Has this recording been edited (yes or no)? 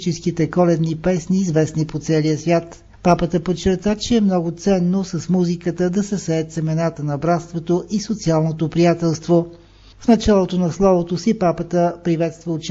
no